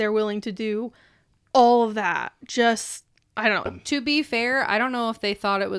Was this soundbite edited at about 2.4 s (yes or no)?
no